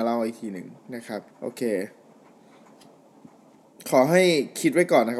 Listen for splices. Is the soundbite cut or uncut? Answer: cut